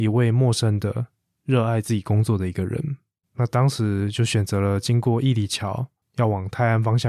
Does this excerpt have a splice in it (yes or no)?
yes